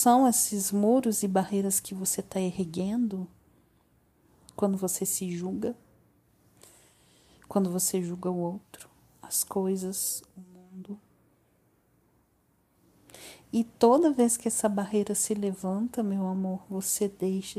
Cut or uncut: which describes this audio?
uncut